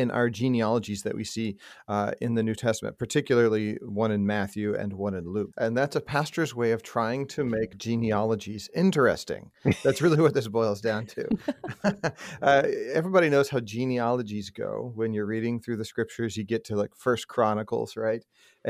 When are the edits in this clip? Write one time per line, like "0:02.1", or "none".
0:05.5